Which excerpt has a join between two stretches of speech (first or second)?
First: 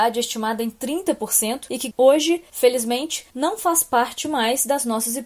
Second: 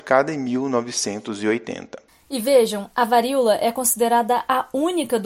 first